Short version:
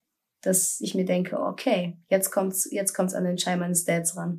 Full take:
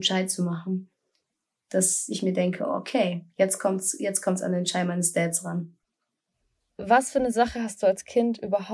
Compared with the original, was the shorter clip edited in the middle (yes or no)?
no